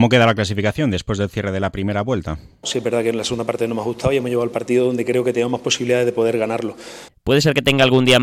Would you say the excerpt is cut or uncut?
cut